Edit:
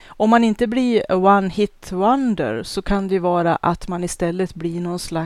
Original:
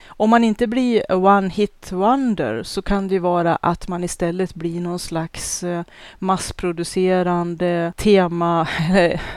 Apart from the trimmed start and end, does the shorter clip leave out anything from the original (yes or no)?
no